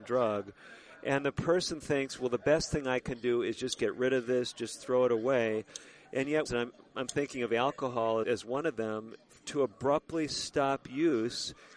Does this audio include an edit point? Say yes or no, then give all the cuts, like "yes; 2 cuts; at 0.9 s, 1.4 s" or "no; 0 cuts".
yes; 2 cuts; at 6.5 s, 8.2 s